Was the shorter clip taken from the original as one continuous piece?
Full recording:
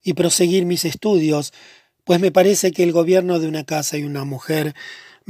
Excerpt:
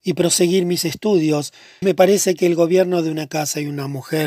no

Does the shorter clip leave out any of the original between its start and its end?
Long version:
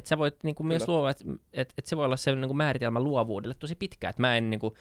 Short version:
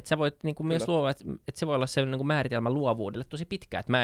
yes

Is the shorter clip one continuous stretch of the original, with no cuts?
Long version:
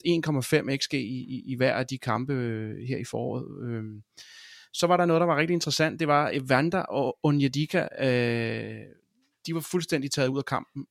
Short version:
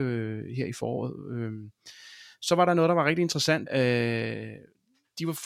no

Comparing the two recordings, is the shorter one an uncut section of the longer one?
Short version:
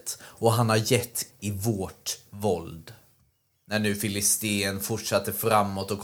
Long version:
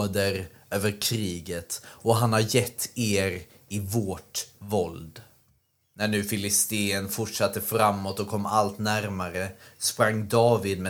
no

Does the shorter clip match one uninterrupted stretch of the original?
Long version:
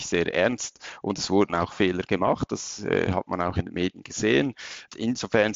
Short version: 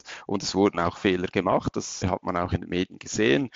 no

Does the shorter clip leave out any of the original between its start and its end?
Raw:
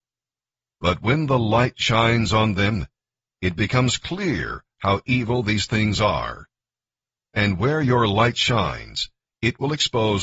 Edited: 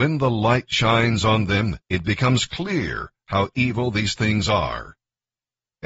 yes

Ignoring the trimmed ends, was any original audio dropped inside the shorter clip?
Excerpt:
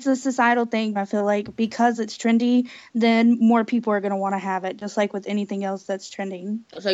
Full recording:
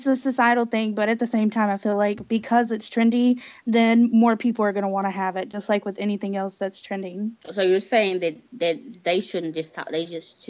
yes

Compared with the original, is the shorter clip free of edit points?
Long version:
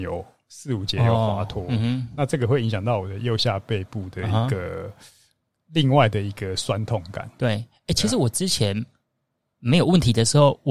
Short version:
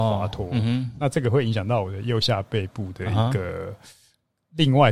yes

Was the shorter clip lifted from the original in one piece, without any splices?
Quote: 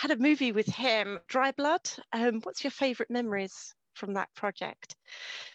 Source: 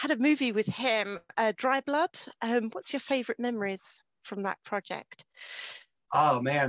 no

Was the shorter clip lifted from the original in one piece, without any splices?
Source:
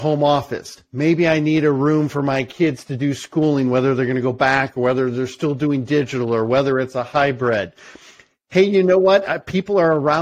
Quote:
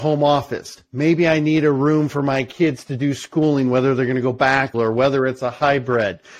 no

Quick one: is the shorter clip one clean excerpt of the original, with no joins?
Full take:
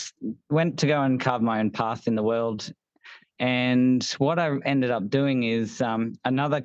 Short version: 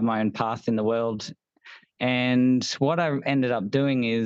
yes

